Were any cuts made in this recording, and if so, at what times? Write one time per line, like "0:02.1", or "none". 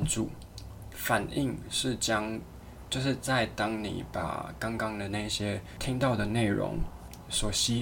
0:00.9

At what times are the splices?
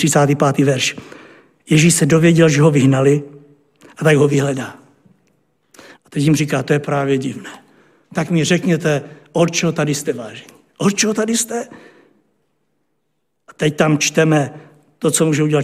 0:06.0

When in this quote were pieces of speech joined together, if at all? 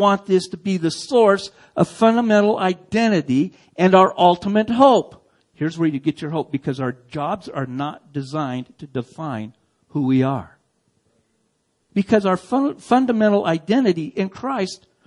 0:05.4
0:11.9

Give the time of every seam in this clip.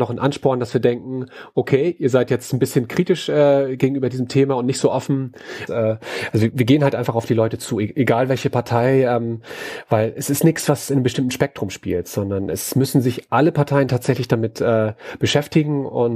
0:05.7

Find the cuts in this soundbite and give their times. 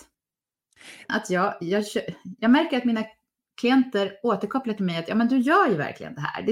0:01.1

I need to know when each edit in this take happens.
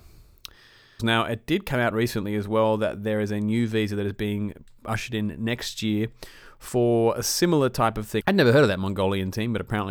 0:01.0
0:08.2

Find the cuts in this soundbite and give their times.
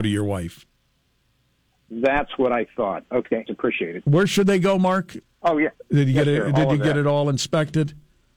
0:03.5
0:05.2

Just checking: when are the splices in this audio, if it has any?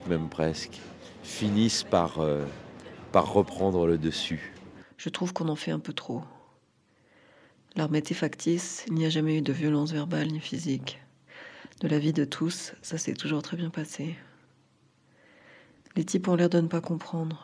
none

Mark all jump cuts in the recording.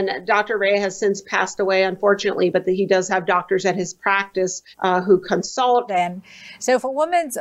0:04.7
0:05.9

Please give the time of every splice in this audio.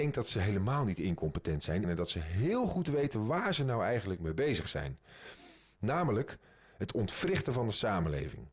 0:01.8

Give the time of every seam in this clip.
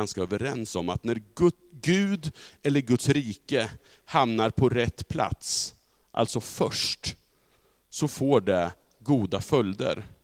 none

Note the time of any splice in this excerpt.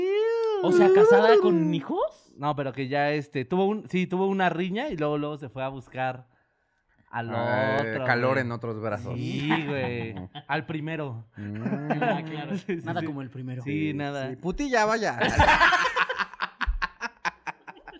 none

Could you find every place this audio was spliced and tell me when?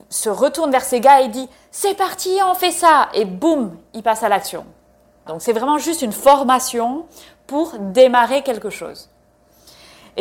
0:05.3

